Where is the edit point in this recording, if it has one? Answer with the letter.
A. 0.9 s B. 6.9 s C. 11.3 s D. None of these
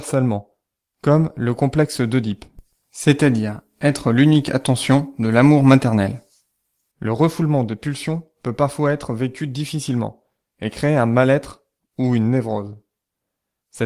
B